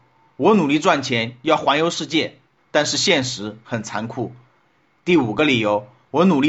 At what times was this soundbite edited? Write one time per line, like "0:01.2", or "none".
0:02.6